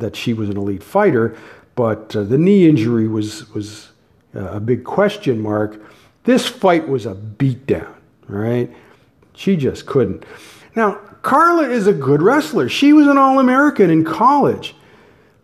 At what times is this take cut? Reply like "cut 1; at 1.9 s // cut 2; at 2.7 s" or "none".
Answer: cut 1; at 6.2 s // cut 2; at 9.2 s // cut 3; at 10.6 s